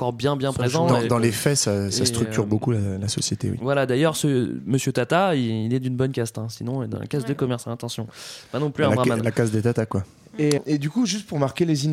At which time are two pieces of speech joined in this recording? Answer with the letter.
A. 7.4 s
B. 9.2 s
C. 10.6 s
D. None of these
C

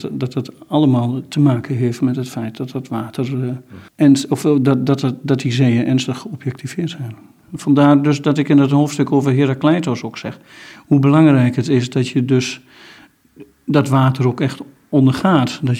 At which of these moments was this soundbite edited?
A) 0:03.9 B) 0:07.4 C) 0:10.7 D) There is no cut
A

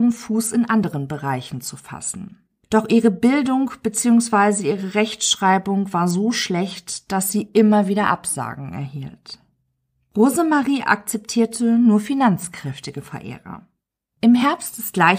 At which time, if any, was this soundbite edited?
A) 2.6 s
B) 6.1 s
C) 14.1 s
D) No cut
C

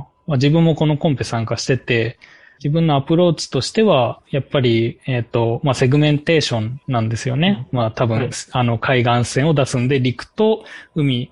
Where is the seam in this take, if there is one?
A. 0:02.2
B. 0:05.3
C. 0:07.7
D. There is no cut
D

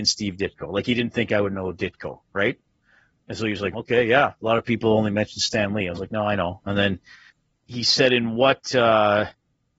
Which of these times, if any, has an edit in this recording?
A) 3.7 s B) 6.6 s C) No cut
A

